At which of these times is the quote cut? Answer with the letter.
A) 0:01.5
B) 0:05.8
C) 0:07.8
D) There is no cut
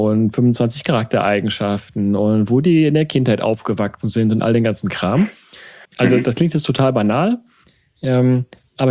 B